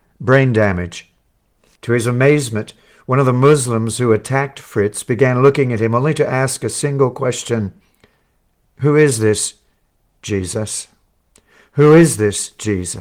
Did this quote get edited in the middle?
yes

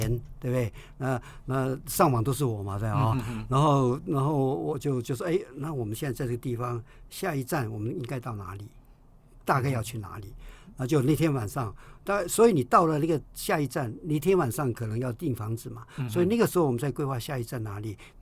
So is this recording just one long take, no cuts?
yes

